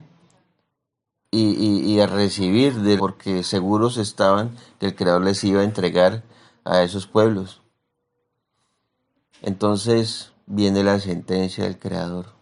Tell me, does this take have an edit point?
yes; 1 cut; at 3.0 s

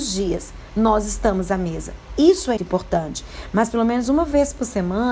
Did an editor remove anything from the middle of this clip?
yes; 1 cut; at 2.6 s

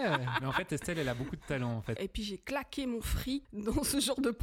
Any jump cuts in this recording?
yes; 2 cuts; at 2.0 s, 3.4 s

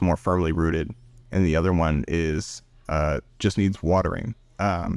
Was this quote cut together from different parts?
yes; 1 cut; at 3.3 s

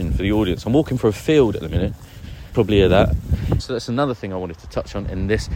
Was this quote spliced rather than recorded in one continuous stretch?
yes; 2 cuts; at 2.5 s, 3.6 s

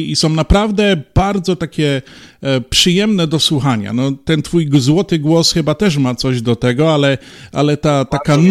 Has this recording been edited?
no; 0 cuts

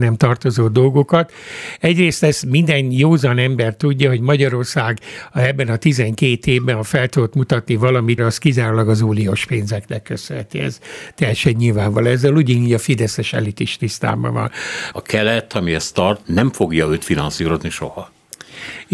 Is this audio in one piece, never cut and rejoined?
no; 3 cuts; at 8.2 s, 14.9 s, 16.2 s

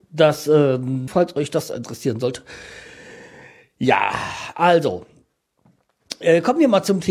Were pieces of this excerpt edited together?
yes; 1 cut; at 1.1 s

